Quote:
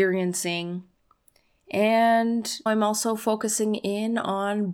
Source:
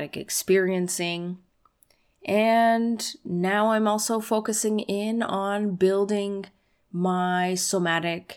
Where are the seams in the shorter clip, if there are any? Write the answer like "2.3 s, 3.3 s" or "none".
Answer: 2.7 s

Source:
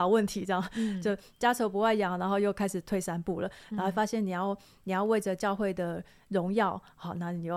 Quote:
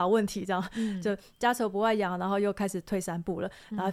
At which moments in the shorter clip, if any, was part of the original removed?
none

